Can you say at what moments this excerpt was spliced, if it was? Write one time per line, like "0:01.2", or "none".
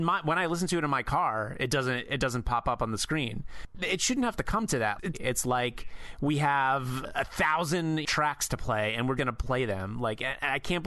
0:05.1
0:09.2